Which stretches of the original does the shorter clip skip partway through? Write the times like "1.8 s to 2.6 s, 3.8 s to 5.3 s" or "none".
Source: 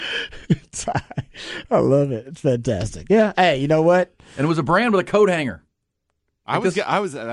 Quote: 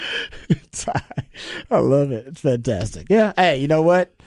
none